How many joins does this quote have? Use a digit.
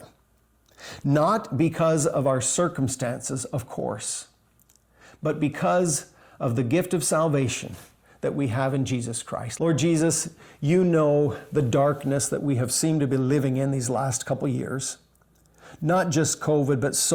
1